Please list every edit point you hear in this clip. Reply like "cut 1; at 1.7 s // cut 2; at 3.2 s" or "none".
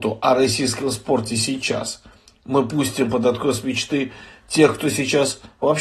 none